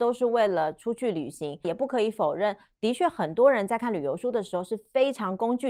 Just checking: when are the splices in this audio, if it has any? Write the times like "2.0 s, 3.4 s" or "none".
1.6 s